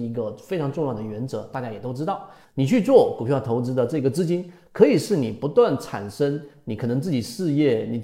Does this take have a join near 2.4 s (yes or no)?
yes